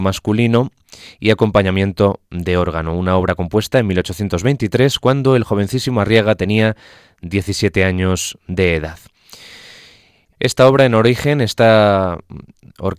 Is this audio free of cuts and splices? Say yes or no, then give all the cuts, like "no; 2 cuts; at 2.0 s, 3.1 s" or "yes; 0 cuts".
no; 1 cut; at 10.3 s